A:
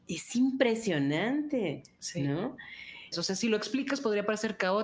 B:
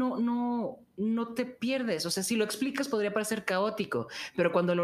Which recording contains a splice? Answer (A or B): A